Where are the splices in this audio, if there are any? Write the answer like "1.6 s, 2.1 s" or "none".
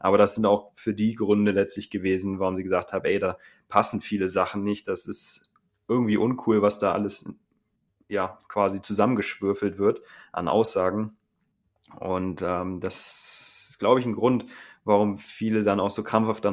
none